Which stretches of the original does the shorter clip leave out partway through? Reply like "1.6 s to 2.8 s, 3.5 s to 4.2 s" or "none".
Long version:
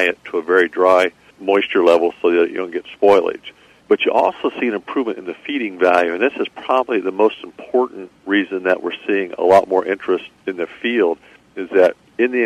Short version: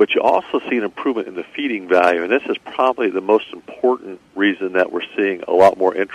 none